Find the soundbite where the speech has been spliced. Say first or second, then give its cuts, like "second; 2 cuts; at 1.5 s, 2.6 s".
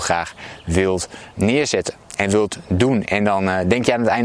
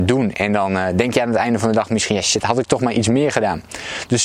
first; 1 cut; at 1.3 s